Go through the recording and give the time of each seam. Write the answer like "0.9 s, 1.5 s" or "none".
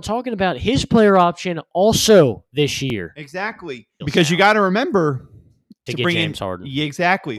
4.0 s, 5.9 s